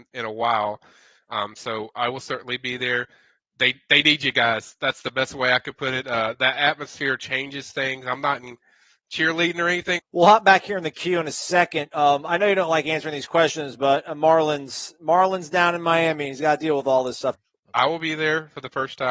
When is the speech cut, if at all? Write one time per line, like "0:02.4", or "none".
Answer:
0:10.0
0:17.3